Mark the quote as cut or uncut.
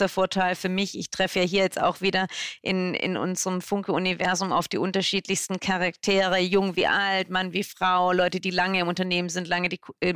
uncut